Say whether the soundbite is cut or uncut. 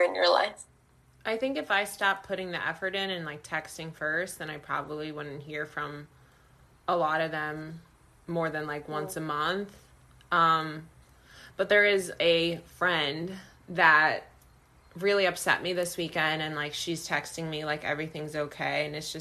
uncut